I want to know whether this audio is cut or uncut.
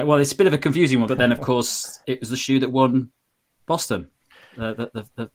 cut